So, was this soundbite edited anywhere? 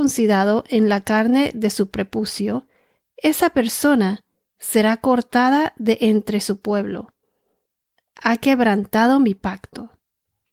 no; 0 cuts

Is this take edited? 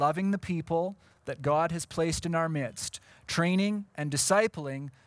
yes; 1 cut; at 3.9 s

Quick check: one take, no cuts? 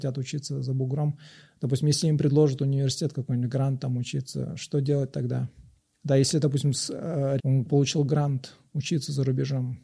no; 1 cut; at 7.4 s

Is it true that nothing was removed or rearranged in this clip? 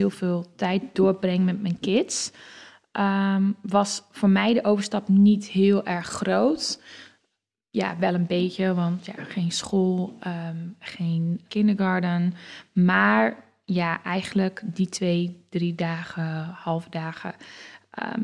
no; 1 cut; at 11.5 s

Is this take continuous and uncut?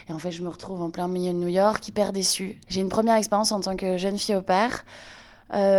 no; 1 cut; at 2.6 s

